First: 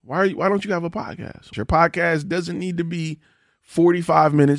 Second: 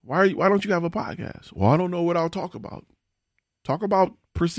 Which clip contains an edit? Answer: first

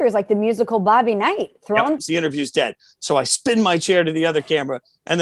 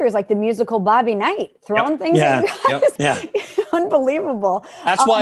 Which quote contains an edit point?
first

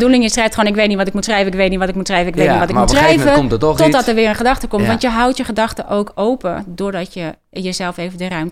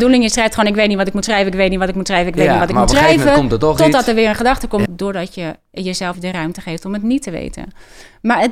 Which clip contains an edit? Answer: second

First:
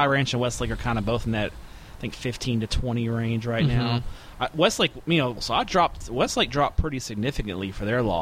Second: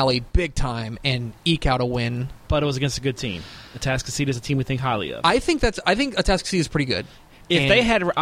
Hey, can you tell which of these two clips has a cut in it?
first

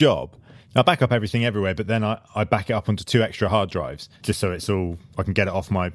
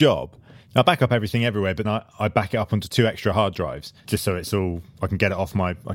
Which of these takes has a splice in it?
second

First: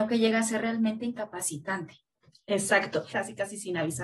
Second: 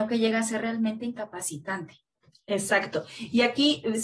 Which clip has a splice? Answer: first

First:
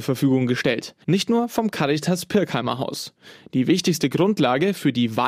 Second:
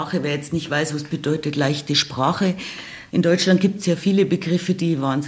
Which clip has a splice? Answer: first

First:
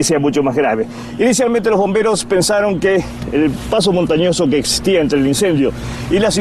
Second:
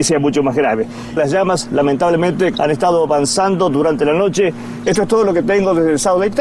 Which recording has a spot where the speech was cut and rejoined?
second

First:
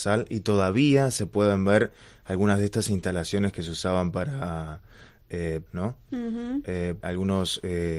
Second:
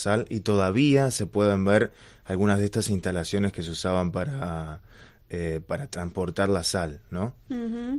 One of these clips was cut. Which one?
first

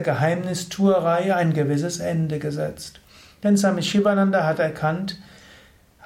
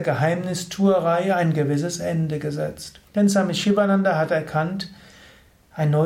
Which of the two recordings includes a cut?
second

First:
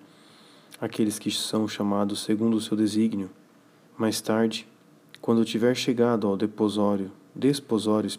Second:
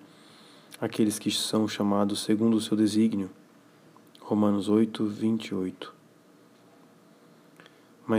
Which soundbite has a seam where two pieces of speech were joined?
first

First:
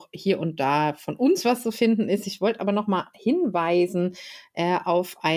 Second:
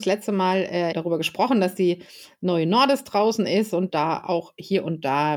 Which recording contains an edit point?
second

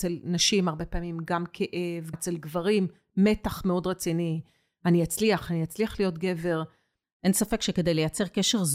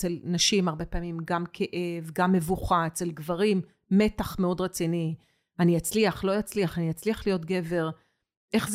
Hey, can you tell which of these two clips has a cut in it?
first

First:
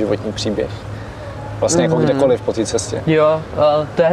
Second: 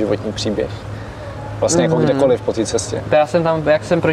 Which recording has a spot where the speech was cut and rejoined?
second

